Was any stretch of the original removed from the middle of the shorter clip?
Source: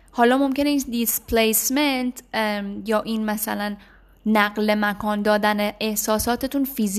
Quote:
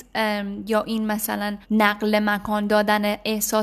yes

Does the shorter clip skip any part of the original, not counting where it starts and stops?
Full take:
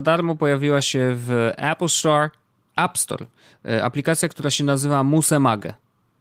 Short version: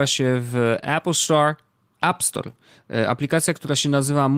no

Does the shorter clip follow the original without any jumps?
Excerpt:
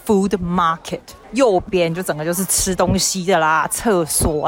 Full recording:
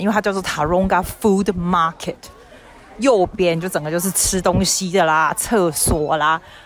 no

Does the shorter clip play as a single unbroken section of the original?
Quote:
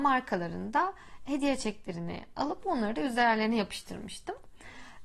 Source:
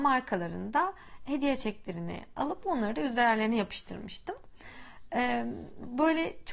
yes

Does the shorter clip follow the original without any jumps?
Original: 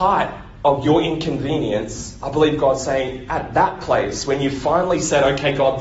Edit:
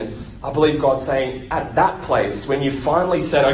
yes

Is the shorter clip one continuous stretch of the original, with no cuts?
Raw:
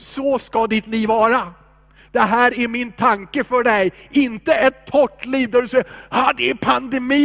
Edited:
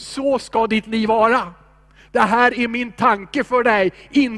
yes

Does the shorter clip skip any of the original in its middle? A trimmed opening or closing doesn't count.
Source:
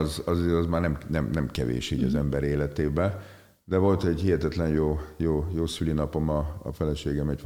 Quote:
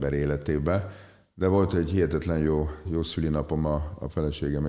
yes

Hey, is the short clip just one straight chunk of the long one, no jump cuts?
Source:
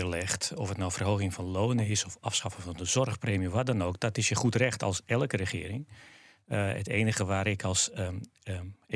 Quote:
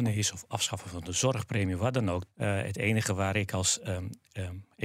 no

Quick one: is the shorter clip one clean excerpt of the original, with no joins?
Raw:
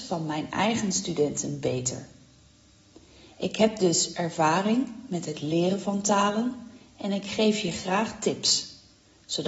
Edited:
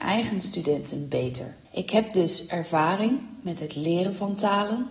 no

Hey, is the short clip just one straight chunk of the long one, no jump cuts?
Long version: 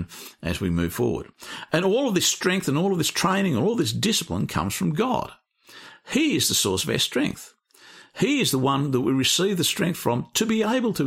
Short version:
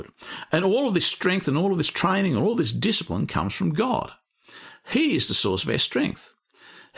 yes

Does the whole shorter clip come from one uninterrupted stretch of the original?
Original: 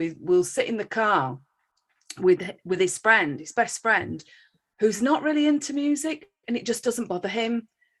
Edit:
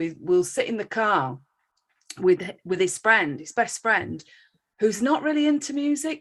yes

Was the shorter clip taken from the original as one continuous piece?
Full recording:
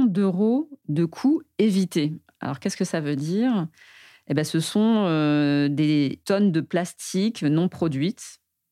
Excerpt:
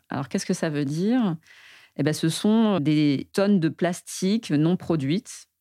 no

